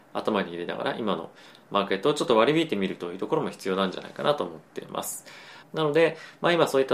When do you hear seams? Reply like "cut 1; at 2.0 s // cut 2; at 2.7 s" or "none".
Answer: cut 1; at 5.6 s